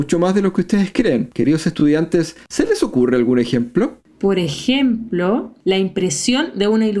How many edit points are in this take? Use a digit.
0